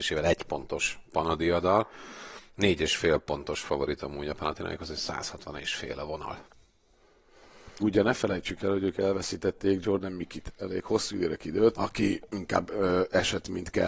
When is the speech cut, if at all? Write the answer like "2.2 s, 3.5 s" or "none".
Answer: 7.8 s, 11.7 s